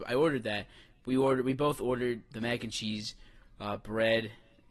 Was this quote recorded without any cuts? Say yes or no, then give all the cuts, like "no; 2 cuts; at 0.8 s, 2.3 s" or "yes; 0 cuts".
no; 1 cut; at 2.3 s